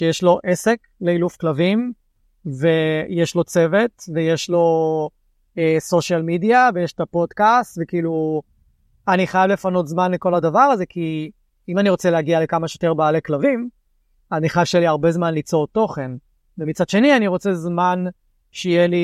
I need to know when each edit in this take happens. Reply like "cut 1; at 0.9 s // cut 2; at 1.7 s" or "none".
none